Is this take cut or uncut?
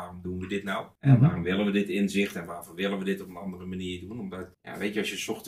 uncut